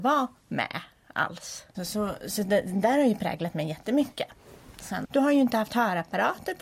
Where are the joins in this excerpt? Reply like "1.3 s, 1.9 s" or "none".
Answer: 5.0 s